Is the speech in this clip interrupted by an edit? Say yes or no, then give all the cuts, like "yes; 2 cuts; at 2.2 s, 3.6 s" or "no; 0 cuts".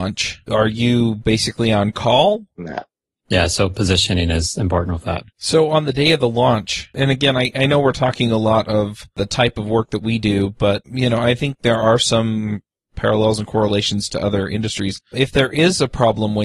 yes; 2 cuts; at 2.6 s, 5.3 s